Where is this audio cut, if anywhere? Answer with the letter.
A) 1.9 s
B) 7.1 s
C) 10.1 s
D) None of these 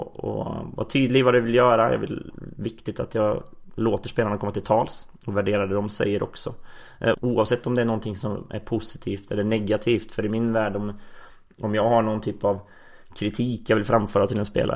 B